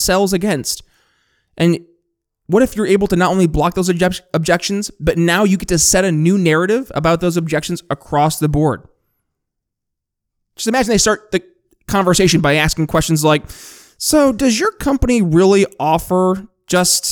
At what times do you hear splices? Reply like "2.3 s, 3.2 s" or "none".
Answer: 10.4 s